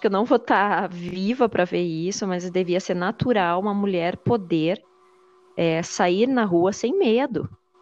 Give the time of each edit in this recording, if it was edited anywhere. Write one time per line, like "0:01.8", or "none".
none